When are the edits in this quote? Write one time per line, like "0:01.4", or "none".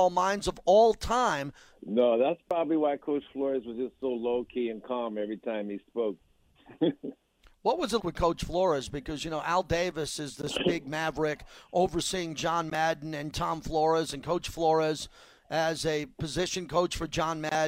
0:01.8
0:06.2
0:08.0

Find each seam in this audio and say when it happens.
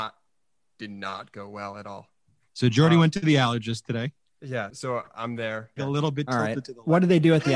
0:04.7
0:05.8

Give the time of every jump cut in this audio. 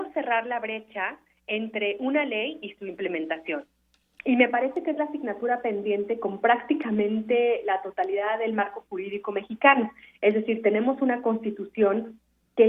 none

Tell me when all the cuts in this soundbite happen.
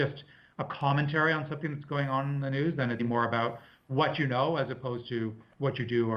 0:03.0

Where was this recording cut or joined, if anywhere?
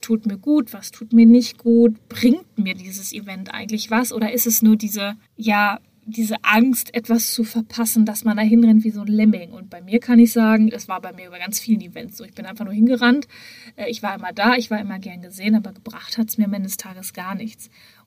0:05.2
0:10.7

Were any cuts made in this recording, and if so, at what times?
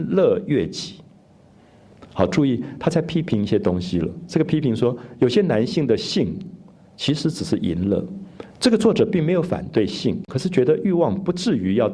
0:08.5
0:10.3

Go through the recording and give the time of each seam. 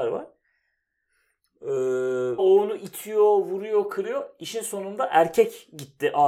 0:02.4

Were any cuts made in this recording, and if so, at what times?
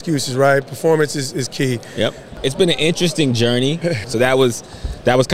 0:02.3
0:04.0

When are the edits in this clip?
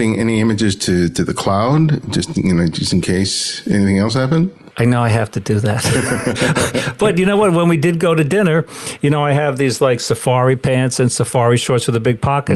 none

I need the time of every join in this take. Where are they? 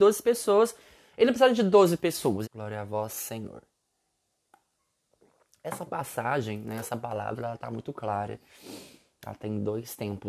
0:02.4

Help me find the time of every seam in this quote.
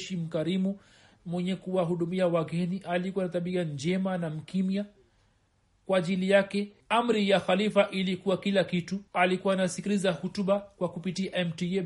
0:06.8
0:09.1

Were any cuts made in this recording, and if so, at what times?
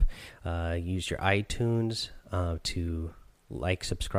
none

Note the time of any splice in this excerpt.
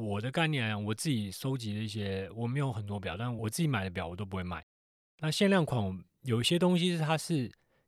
0:03.4
0:05.0

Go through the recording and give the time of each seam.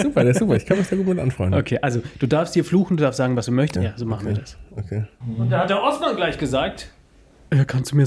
0:03.8
0:05.2

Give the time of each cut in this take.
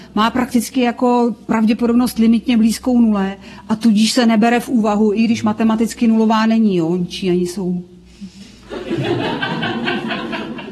none

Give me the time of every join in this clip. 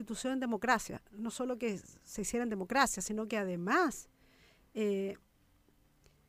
none

